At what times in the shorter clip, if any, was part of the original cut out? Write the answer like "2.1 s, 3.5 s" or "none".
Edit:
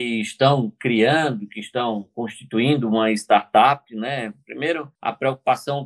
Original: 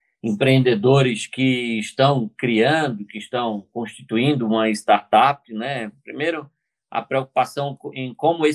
5.0 s